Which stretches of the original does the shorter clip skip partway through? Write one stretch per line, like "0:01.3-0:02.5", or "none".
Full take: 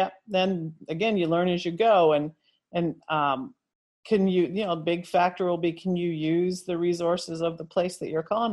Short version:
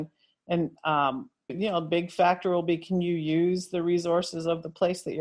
0:03.7-0:04.4